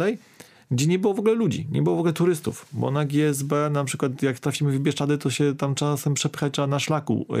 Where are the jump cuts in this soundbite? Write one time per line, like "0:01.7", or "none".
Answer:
none